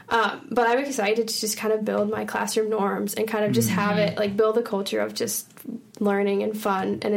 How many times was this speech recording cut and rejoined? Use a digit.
0